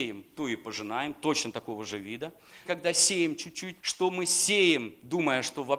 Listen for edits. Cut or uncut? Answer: cut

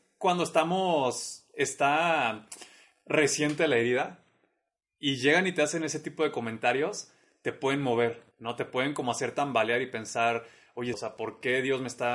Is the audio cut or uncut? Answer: cut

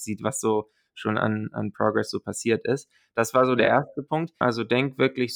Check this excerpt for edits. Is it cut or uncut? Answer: cut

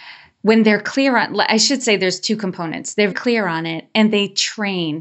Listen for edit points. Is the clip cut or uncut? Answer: cut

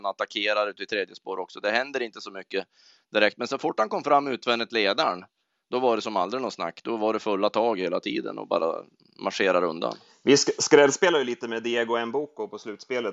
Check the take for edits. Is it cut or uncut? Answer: uncut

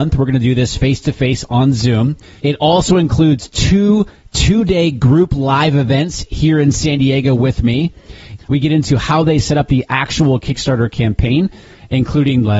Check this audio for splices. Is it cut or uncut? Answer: cut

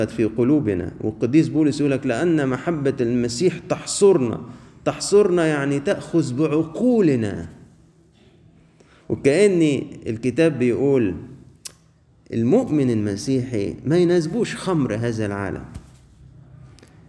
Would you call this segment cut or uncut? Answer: uncut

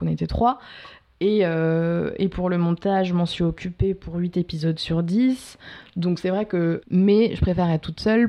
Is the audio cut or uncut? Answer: cut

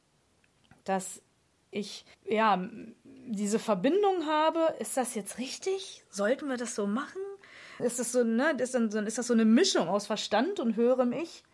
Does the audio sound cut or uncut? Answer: cut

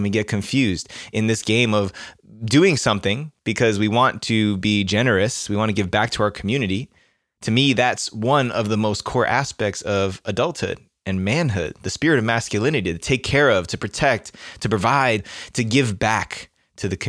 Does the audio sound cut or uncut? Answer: uncut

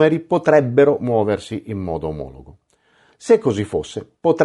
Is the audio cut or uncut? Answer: uncut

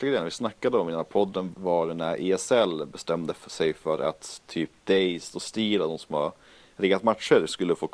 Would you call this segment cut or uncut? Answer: cut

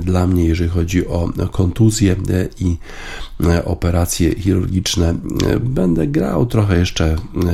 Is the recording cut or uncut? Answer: cut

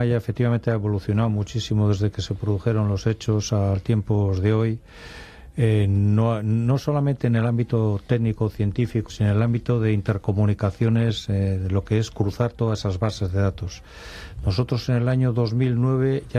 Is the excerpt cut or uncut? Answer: cut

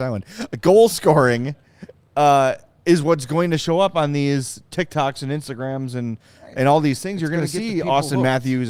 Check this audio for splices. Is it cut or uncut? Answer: uncut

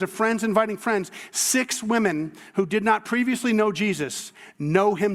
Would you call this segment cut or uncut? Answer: uncut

